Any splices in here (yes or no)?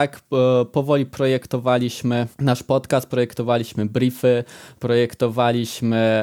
yes